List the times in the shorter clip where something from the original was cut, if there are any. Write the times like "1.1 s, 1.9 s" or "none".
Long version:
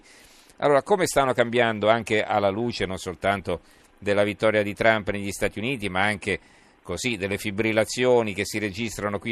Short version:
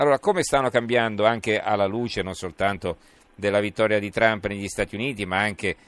none

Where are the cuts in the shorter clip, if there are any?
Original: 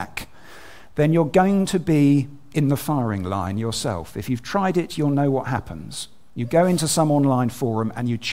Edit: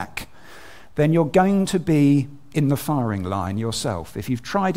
none

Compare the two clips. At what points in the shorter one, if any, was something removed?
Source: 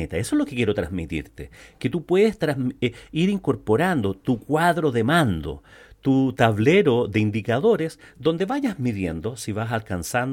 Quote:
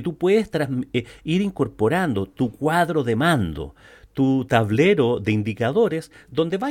none

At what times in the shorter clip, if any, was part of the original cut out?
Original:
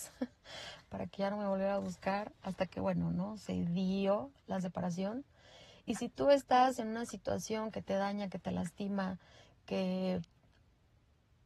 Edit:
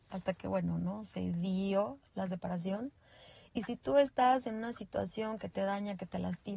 none

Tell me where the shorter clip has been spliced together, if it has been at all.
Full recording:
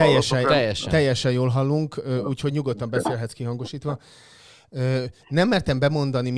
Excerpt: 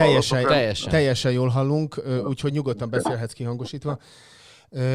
none

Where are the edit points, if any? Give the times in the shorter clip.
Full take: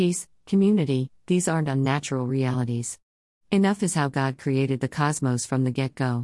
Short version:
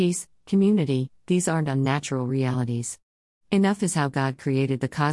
none

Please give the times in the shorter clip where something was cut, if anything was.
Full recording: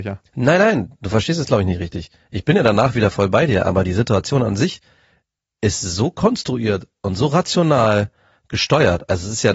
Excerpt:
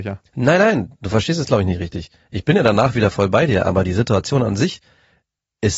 none

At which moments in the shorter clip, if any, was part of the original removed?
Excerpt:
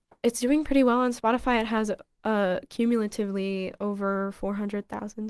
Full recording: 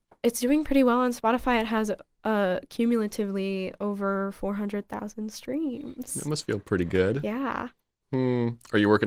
none

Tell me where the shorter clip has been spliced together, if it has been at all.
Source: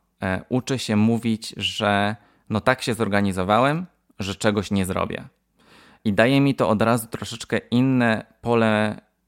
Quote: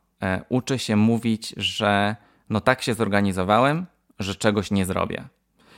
none

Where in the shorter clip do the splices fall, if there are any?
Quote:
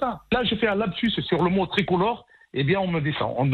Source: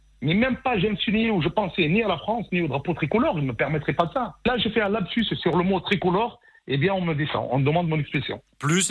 none

